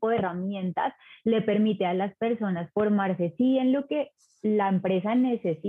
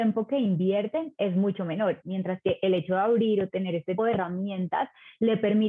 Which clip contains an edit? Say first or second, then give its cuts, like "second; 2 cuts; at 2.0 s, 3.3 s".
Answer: second; 2 cuts; at 2.0 s, 4.0 s